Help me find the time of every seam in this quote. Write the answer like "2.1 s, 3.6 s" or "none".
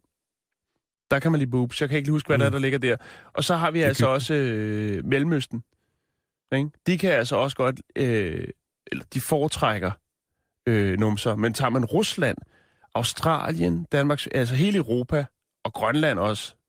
none